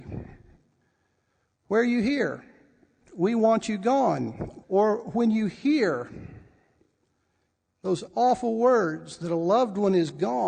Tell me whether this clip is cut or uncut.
cut